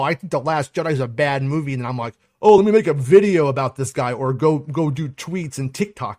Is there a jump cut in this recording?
no; 0 cuts

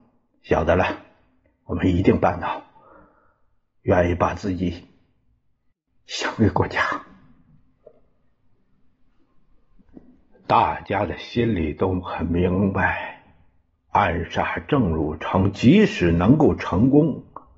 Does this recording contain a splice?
no; 0 cuts

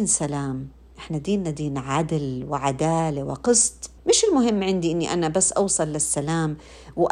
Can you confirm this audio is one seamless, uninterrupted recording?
no; 1 cut; at 4.0 s

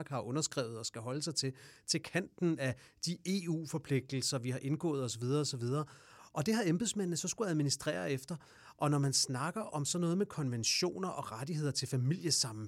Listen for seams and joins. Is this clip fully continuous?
yes; 0 cuts

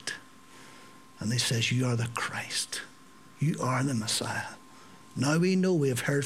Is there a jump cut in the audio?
no; 0 cuts

